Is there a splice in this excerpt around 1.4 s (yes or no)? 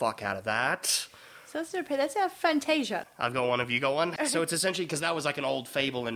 no